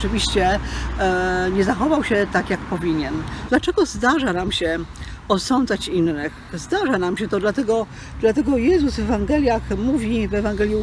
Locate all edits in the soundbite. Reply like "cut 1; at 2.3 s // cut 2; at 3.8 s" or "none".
cut 1; at 3.5 s